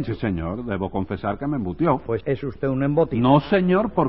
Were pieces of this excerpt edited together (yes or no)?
yes